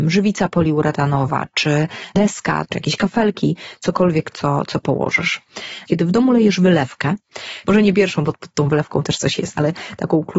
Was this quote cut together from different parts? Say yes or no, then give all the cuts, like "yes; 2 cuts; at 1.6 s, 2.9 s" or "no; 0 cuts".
yes; 2 cuts; at 5.9 s, 7.6 s